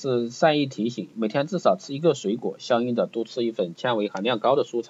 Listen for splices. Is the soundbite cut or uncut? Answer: uncut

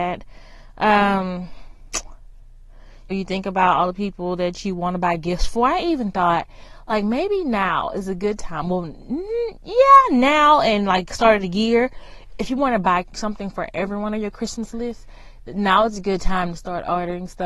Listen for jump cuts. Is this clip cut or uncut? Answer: cut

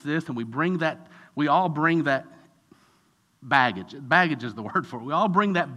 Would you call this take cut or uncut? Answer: uncut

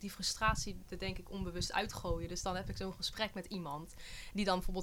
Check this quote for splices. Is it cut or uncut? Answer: uncut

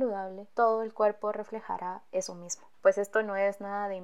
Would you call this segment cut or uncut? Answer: cut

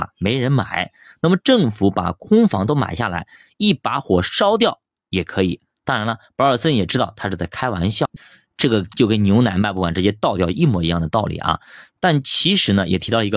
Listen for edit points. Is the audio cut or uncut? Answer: uncut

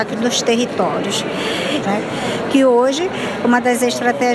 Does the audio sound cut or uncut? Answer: cut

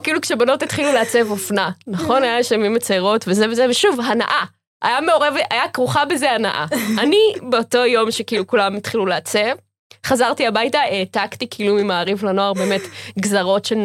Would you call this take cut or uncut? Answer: uncut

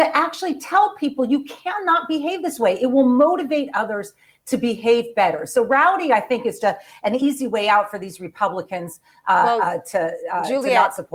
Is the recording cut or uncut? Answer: cut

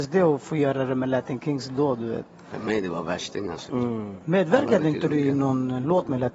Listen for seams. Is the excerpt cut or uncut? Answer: cut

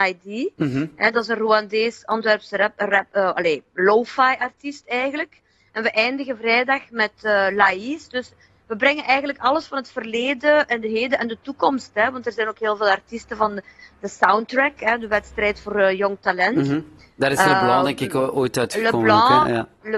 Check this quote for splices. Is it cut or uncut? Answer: uncut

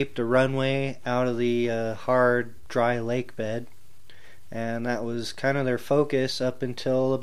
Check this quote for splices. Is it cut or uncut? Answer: uncut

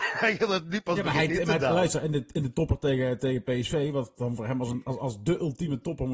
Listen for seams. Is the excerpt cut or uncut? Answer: uncut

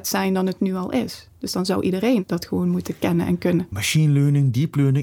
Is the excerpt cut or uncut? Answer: cut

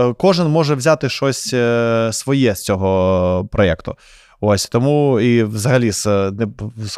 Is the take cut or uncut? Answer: uncut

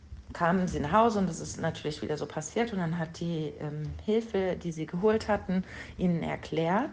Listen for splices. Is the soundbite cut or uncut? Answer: uncut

